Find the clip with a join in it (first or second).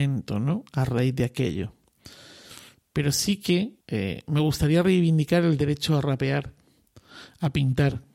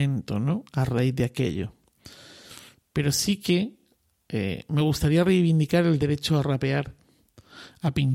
first